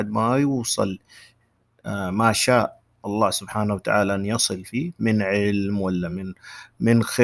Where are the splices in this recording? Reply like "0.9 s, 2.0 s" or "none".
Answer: none